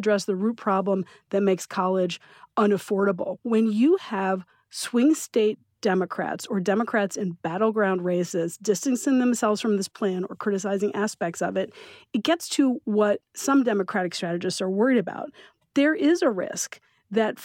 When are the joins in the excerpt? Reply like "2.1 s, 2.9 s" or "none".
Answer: none